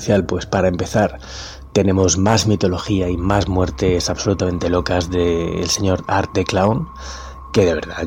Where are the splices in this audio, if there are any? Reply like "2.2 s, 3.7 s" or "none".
none